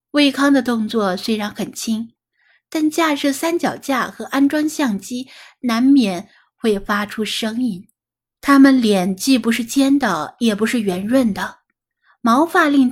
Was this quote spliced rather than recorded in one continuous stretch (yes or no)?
yes